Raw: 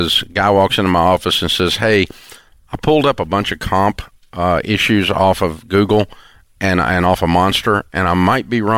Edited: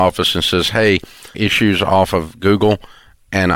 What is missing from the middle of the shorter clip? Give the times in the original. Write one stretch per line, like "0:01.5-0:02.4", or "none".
0:02.4-0:04.6